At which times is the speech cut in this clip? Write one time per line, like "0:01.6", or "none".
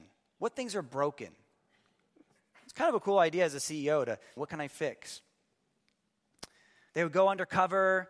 0:04.4
0:06.9